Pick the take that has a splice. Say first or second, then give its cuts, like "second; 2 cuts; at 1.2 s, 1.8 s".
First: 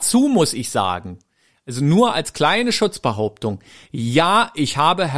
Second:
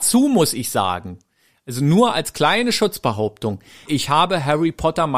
second; 1 cut; at 3.9 s